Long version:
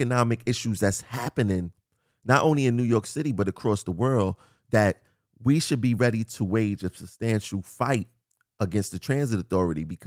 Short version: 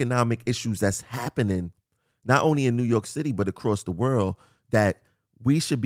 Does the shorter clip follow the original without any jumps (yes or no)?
yes